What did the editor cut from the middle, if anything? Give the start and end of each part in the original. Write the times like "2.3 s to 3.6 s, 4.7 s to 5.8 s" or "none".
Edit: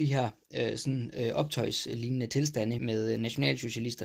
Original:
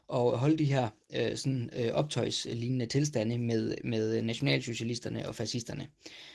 3.4 s to 3.8 s